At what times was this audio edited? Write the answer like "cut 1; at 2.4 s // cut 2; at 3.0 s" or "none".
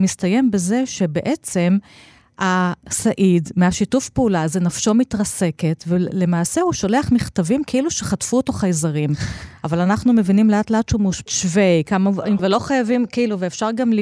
cut 1; at 11.3 s // cut 2; at 12.4 s